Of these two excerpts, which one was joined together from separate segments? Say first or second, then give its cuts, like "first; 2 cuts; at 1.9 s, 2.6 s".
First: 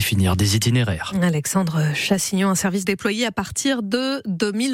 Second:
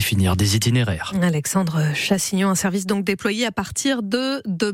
first; 1 cut; at 2.8 s